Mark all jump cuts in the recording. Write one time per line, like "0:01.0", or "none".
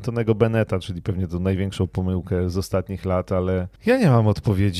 0:03.8